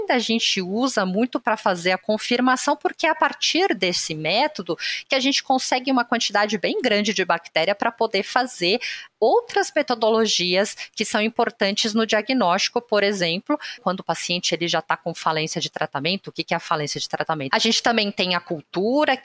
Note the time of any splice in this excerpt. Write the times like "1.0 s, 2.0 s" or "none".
13.8 s, 17.5 s